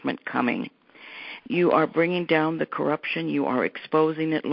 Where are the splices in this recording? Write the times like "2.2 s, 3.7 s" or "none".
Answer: 1.4 s